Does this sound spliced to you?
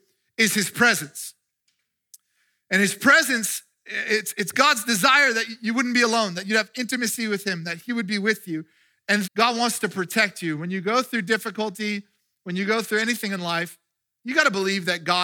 yes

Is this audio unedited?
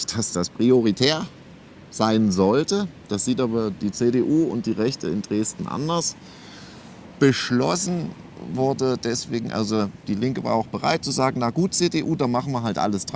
yes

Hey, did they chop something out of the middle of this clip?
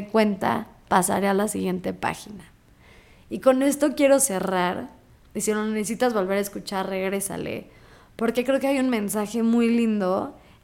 no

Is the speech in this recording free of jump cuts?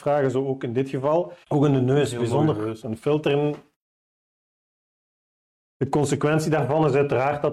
no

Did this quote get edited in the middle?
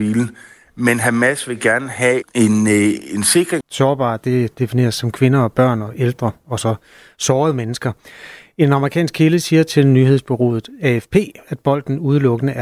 yes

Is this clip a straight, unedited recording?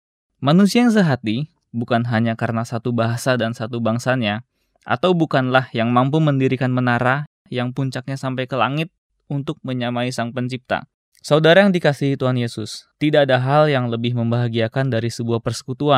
no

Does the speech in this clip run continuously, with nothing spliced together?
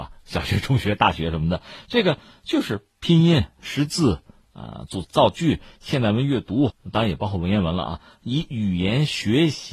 no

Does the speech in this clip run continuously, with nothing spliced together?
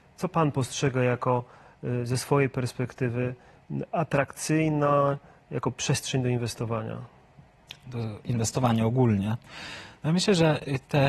yes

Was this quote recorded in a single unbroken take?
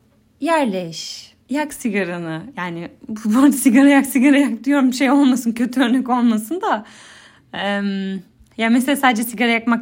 no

